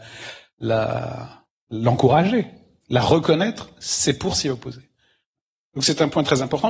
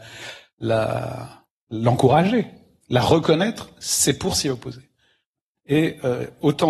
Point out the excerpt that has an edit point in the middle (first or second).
second